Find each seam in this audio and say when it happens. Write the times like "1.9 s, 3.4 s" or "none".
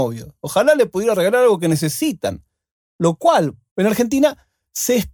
3.7 s